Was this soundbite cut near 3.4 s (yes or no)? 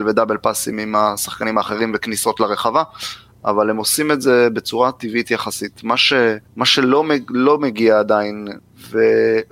no